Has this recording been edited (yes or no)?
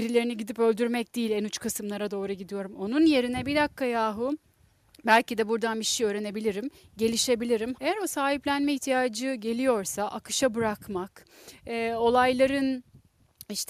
yes